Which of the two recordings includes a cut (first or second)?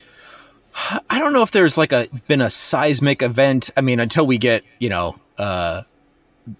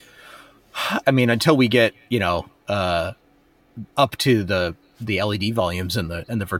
second